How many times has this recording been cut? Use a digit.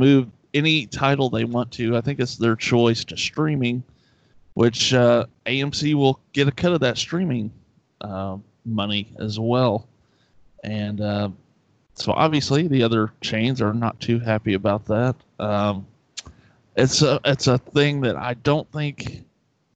0